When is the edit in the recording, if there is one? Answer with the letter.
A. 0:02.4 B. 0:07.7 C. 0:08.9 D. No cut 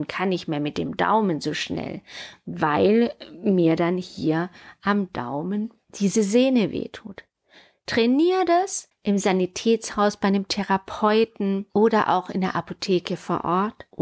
C